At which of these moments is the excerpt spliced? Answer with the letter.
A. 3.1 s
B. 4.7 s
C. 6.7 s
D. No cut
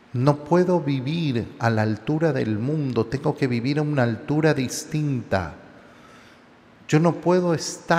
D